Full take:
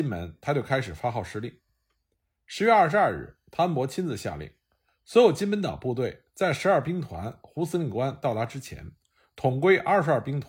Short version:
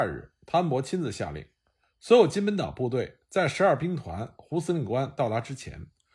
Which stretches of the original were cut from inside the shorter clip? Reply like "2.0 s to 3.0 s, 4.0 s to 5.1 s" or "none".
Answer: none